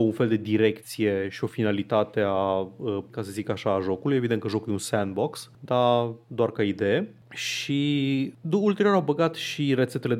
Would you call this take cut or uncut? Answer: cut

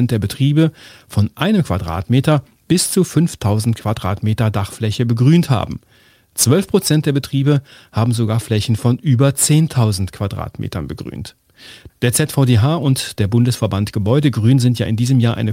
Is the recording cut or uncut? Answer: cut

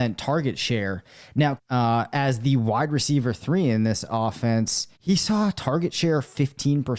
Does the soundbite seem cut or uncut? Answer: cut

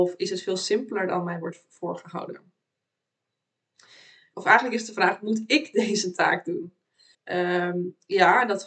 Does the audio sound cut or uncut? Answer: cut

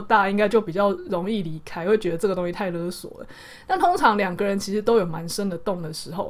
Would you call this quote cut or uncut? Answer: uncut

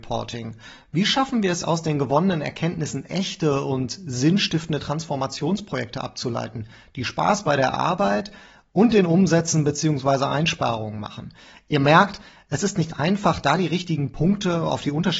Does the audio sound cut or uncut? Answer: uncut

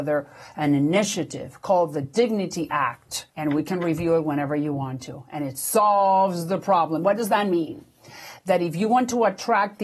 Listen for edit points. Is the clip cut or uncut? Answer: cut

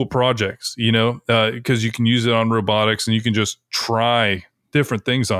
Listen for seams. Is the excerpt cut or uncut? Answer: uncut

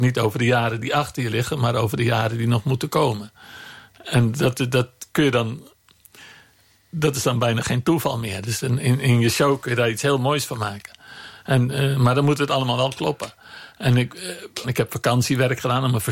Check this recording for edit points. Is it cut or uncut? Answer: cut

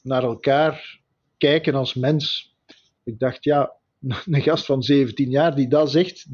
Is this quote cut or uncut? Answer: cut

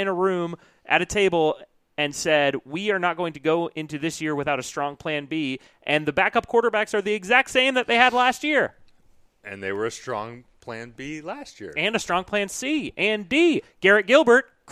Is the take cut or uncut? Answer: uncut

